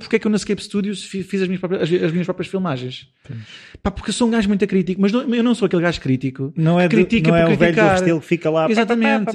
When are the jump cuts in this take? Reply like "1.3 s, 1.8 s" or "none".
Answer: none